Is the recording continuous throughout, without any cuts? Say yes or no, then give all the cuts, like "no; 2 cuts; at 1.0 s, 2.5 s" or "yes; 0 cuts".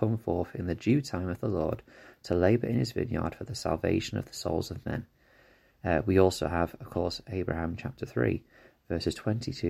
yes; 0 cuts